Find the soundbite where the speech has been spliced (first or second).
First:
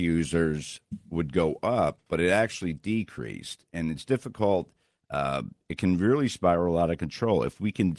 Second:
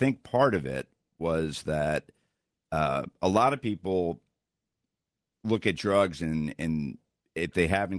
first